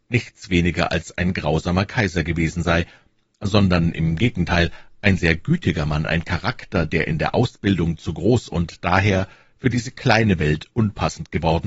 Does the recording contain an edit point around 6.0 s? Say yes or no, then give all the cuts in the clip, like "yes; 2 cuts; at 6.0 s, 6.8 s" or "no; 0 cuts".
no; 0 cuts